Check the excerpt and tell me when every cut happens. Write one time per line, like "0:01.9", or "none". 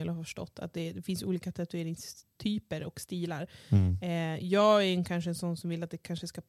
none